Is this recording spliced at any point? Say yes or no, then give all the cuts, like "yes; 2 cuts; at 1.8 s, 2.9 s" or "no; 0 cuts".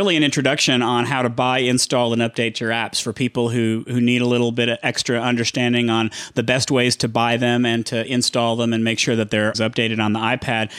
yes; 1 cut; at 9.5 s